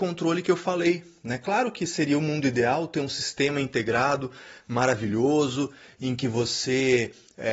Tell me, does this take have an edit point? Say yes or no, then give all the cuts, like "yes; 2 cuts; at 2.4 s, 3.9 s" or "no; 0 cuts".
no; 0 cuts